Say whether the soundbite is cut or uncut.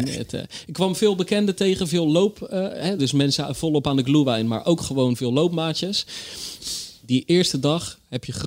uncut